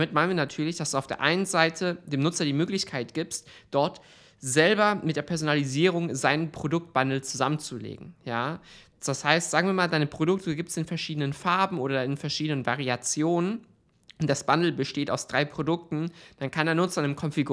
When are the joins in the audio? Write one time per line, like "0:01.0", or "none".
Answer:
none